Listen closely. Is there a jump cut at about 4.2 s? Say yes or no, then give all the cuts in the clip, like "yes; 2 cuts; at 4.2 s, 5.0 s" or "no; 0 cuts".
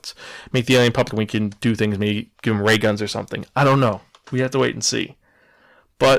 no; 1 cut; at 1.1 s